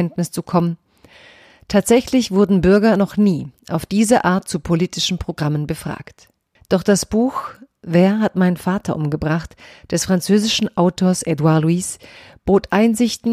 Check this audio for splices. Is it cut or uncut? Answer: cut